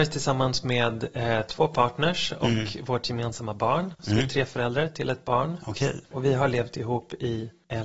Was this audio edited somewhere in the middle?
no; 0 cuts

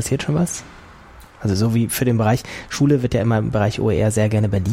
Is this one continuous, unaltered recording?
yes; 0 cuts

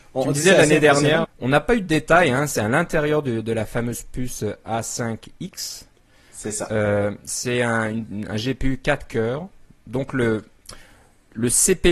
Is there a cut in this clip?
yes; 1 cut; at 1.2 s

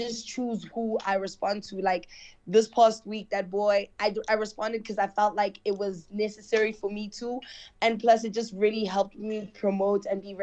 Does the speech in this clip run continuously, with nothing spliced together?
yes; 0 cuts

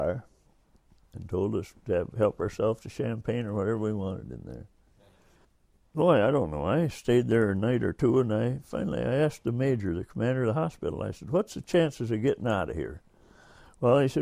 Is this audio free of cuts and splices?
yes; 0 cuts

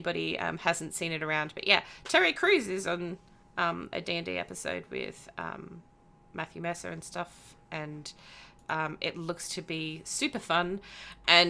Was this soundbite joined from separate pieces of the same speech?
no; 0 cuts

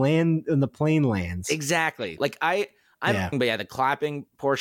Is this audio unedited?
no; 2 cuts; at 2.2 s, 3.3 s

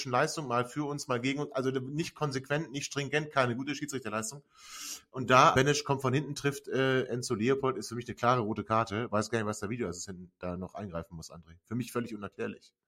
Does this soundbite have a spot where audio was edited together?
yes; 1 cut; at 5.5 s

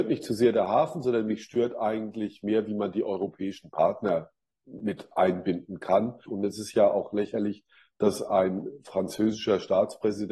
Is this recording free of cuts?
no; 1 cut; at 6.3 s

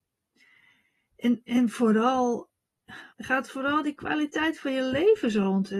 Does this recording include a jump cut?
yes; 1 cut; at 3.1 s

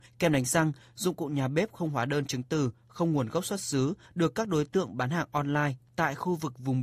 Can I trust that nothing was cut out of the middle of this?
yes; 0 cuts

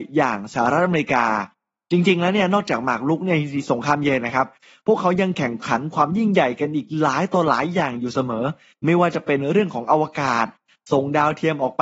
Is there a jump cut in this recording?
no; 0 cuts

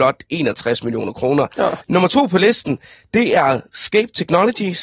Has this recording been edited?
yes; 1 cut; at 1.8 s

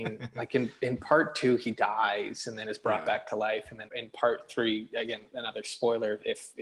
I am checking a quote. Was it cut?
yes; 1 cut; at 3.9 s

